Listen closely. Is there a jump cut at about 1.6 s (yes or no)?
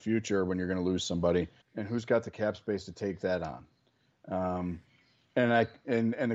yes